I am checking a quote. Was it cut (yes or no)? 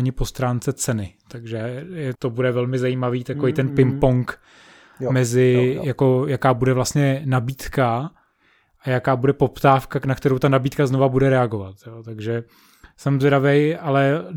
yes